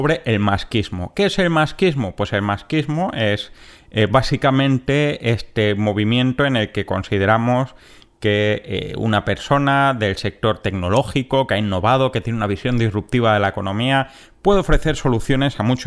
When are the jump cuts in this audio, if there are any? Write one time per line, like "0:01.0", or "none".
none